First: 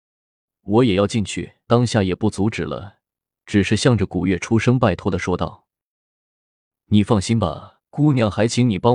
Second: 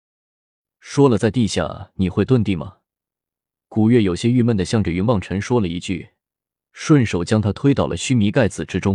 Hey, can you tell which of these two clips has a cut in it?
first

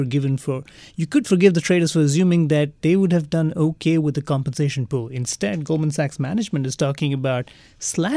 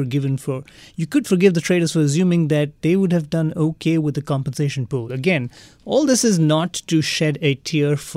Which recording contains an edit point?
second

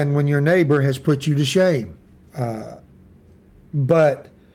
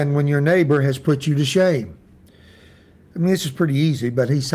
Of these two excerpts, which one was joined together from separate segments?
first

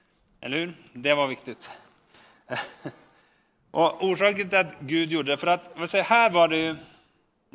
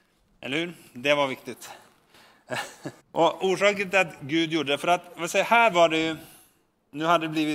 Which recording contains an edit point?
second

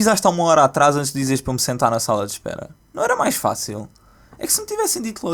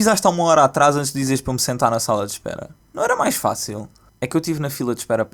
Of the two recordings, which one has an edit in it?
second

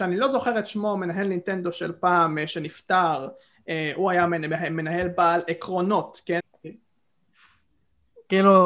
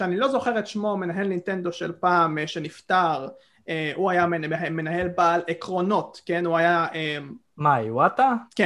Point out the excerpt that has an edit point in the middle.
first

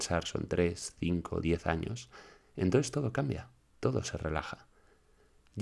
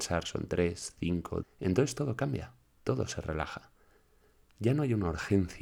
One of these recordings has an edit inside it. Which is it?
second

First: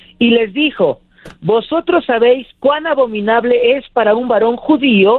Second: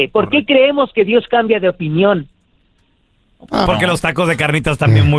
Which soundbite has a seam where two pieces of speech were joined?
second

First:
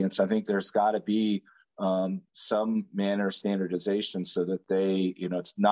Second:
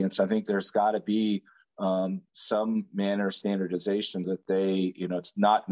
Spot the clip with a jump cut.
second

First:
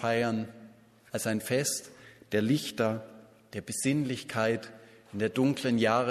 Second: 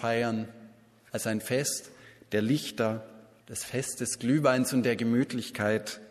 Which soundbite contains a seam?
second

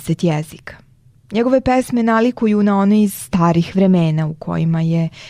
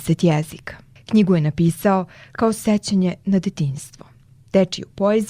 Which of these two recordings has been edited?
second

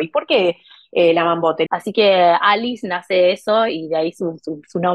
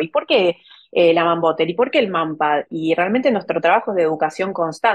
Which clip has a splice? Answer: first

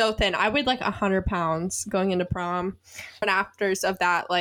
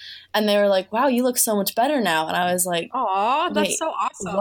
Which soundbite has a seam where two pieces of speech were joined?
first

